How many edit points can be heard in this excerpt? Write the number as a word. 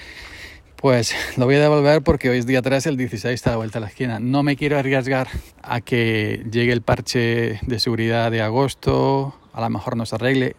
one